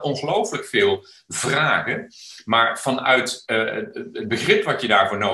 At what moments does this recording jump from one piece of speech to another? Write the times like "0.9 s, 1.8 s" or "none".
none